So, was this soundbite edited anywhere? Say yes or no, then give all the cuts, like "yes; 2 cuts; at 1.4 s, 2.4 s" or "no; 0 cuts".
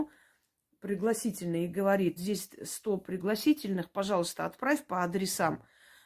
yes; 1 cut; at 2.2 s